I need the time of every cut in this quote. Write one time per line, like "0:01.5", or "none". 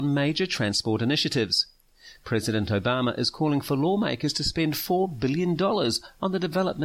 none